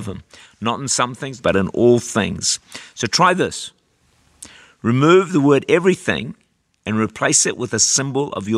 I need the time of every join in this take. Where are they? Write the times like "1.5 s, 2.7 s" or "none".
1.4 s